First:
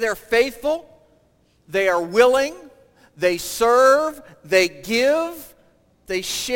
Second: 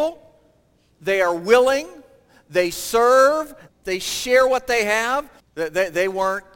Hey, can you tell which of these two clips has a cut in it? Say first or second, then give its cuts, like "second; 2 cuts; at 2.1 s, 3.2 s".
second; 2 cuts; at 3.7 s, 5.4 s